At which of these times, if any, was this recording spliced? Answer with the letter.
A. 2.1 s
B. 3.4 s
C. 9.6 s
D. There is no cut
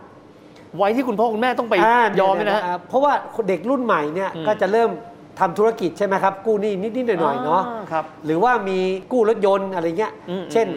A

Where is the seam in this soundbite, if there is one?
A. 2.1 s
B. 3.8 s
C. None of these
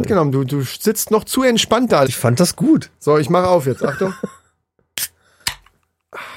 A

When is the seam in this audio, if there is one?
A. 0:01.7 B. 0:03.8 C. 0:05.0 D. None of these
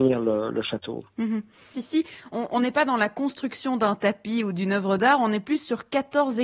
A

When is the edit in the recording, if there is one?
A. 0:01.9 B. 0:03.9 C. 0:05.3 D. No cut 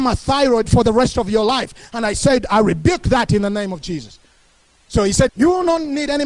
C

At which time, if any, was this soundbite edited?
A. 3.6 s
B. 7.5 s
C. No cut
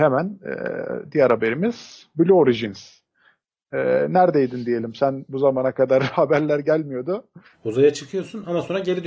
B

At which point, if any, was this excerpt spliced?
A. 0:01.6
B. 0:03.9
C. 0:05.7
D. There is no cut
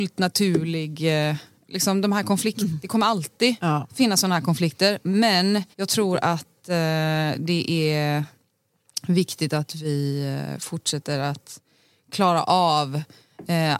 C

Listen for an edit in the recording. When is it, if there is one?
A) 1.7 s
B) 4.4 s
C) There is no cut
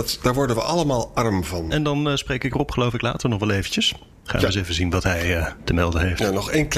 A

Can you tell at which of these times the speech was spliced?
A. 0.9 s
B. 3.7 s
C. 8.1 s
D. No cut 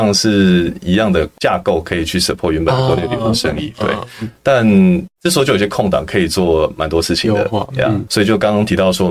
C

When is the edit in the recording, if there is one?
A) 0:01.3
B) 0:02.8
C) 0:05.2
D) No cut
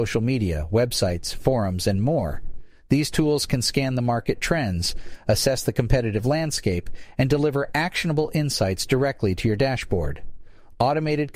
D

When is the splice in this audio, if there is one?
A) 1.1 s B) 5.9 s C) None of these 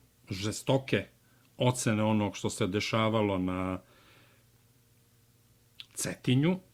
B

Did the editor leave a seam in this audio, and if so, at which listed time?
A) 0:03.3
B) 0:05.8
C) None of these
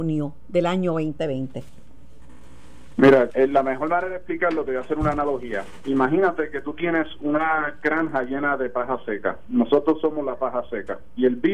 A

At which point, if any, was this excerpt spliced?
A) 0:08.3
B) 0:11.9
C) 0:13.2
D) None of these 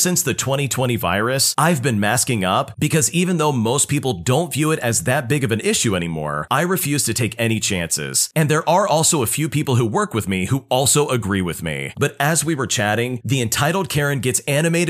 B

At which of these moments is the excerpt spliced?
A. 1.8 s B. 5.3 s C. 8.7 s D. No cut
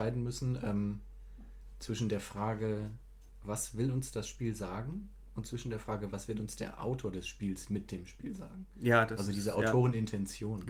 D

